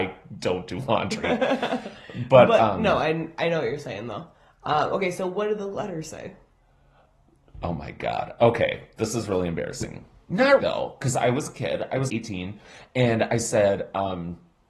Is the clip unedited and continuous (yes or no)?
no